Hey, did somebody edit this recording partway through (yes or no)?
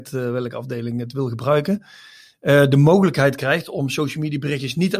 no